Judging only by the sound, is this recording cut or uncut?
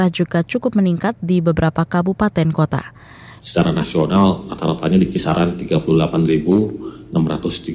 cut